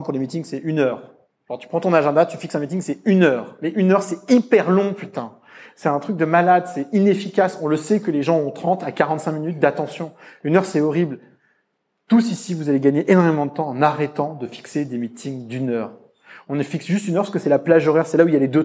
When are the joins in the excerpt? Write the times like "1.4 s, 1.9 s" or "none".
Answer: none